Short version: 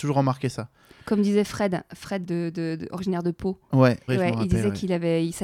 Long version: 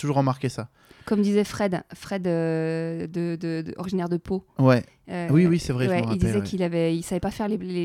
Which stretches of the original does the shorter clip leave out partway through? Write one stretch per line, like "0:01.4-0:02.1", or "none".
0:02.2-0:03.1
0:04.9-0:05.8